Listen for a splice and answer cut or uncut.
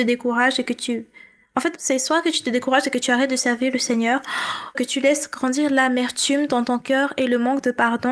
cut